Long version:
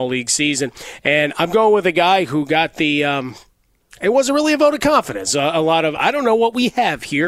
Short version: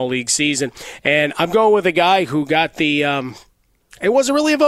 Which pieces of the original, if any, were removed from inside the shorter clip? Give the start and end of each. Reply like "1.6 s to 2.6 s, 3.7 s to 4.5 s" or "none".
none